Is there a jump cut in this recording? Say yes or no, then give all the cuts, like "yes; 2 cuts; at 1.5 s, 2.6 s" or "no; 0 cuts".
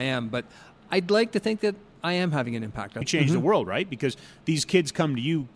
yes; 1 cut; at 3.0 s